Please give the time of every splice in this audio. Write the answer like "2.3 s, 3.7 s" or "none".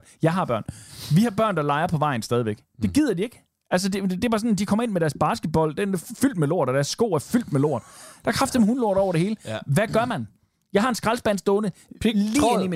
none